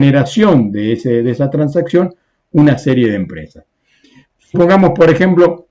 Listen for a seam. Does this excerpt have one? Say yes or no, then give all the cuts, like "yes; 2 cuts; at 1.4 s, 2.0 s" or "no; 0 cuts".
no; 0 cuts